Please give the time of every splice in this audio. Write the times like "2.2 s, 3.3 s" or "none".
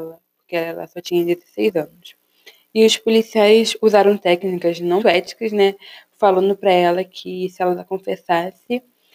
5.0 s